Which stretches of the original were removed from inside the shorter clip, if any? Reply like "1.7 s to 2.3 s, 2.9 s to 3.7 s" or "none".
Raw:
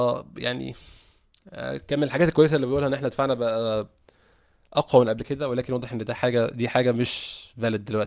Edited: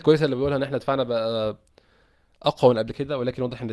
none